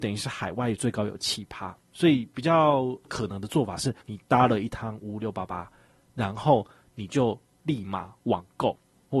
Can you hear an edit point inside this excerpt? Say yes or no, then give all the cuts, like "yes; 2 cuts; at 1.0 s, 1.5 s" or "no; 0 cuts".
yes; 2 cuts; at 1.8 s, 4.0 s